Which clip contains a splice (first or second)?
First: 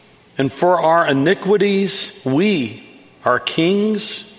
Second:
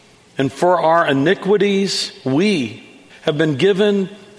second